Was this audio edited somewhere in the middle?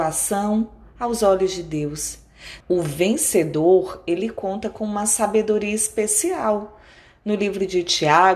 yes; 1 cut; at 2.6 s

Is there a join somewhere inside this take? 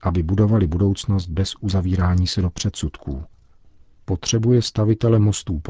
no; 0 cuts

